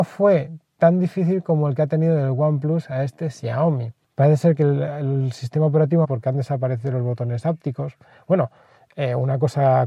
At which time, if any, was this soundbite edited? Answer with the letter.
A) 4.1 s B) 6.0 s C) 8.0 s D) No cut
B